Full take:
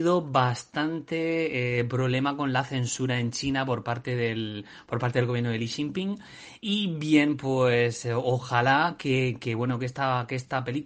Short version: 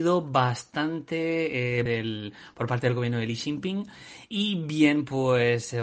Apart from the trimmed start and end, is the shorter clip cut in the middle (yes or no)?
yes